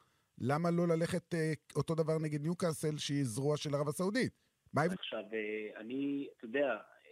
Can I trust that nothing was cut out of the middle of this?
no; 1 cut; at 5.0 s

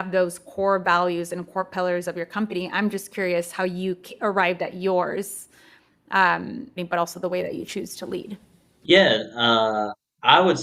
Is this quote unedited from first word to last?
no; 1 cut; at 6.8 s

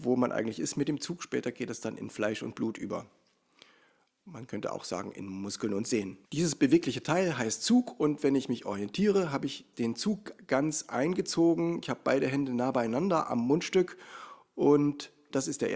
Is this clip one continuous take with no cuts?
no; 1 cut; at 6.2 s

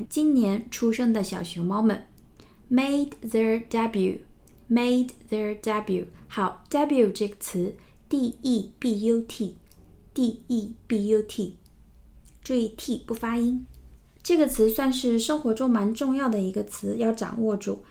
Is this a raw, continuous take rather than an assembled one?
yes; 0 cuts

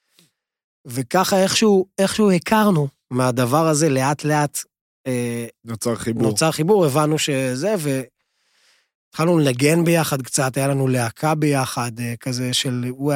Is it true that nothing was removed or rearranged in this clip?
yes; 0 cuts

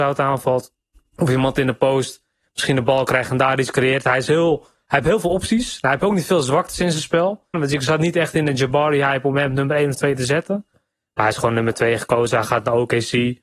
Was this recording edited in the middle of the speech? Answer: yes; 2 cuts; at 7.5 s, 10.7 s

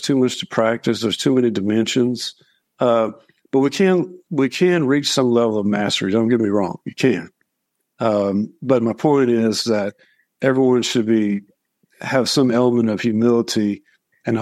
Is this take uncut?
yes; 0 cuts

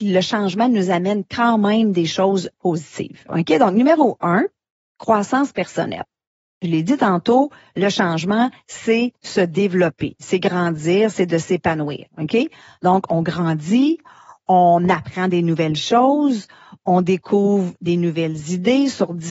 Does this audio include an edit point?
yes; 1 cut; at 3.3 s

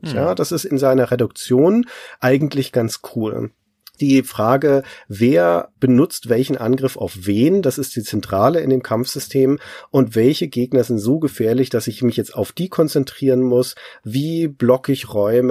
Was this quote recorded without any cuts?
yes; 0 cuts

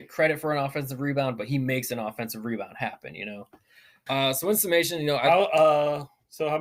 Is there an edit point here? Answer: yes; 1 cut; at 4.1 s

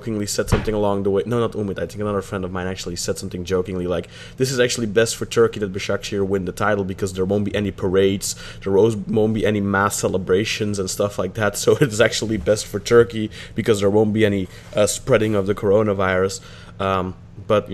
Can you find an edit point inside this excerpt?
no; 0 cuts

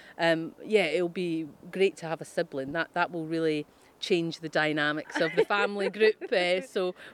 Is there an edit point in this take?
no; 0 cuts

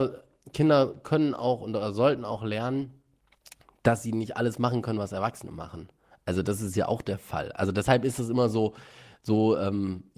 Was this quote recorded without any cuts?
yes; 0 cuts

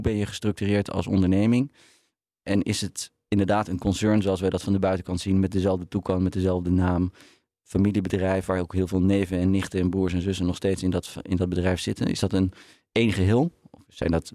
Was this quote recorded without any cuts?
yes; 0 cuts

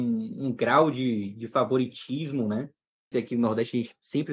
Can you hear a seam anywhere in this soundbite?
yes; 1 cut; at 3.1 s

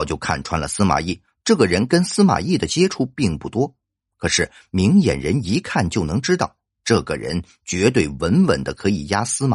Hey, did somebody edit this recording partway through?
yes; 1 cut; at 1.4 s

